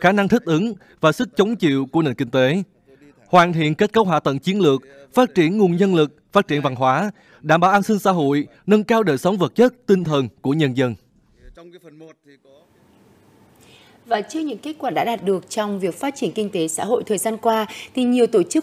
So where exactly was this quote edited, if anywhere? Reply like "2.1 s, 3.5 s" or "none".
none

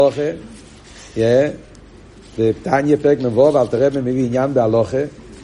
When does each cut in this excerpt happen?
none

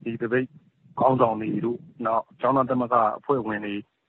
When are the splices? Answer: 1.0 s

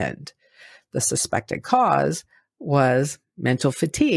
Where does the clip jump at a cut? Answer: none

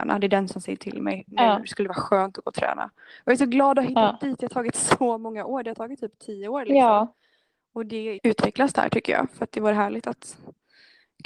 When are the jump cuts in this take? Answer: 8.2 s

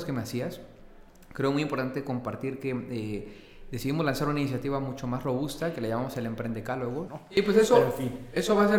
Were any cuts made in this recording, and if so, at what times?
7.1 s

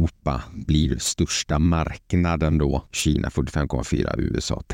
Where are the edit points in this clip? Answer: 2.9 s

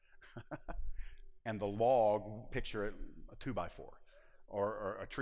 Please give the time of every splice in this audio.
1.4 s, 2.5 s

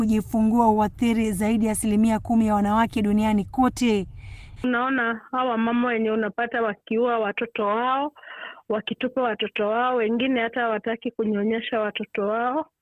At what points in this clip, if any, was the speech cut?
4.6 s

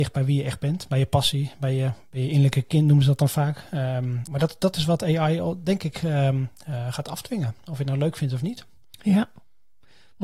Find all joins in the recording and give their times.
4.3 s

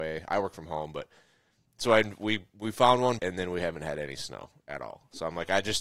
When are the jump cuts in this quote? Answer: 3.2 s

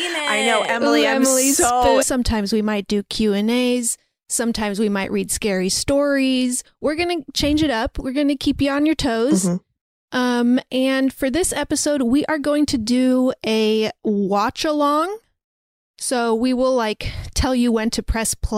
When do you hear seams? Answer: 2.0 s

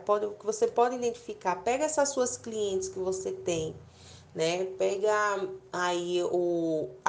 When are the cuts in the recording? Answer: none

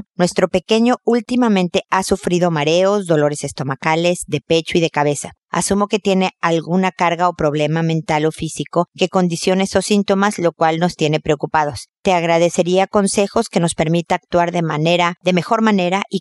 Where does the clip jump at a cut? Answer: none

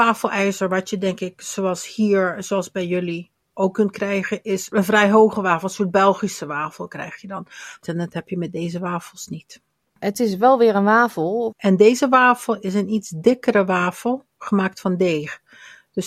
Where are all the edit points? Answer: 7.8 s, 11.5 s

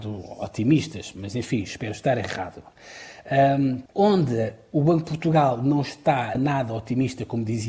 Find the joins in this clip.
3.9 s, 6.4 s

